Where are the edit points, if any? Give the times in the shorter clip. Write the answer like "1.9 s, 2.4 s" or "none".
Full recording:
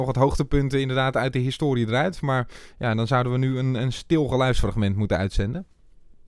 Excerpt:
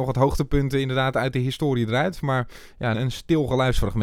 2.9 s